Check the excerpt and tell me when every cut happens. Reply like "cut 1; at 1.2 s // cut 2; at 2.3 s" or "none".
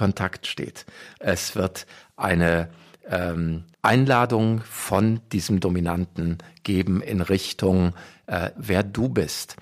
cut 1; at 1.2 s // cut 2; at 3.7 s // cut 3; at 8.6 s